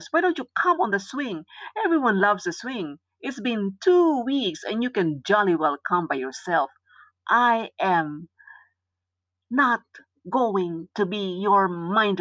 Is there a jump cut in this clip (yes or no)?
no